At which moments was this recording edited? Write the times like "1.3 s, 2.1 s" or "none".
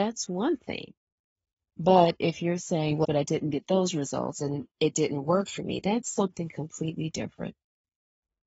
3.0 s